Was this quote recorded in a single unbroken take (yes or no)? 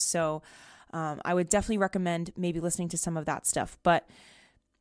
yes